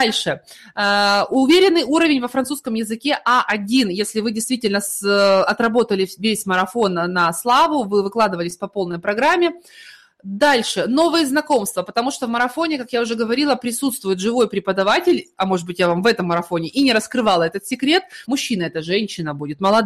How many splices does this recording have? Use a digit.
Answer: 1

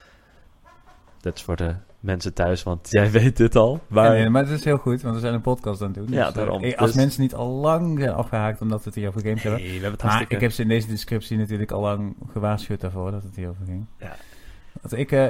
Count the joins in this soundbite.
0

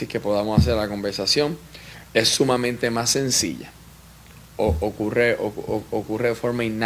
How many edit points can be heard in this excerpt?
0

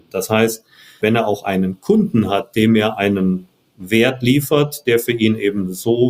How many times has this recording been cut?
1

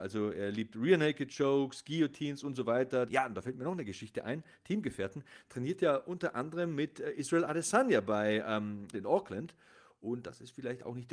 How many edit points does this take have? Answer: 2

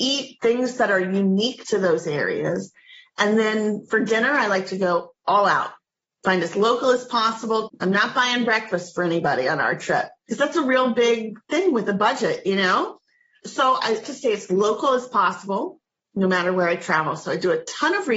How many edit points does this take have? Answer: 2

